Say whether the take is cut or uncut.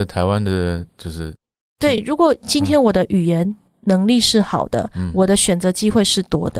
uncut